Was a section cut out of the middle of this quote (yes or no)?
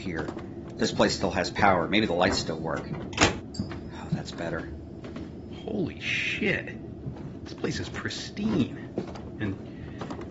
no